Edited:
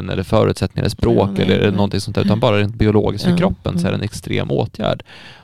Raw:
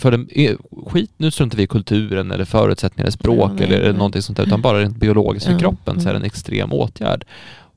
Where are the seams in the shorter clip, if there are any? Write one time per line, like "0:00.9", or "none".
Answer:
none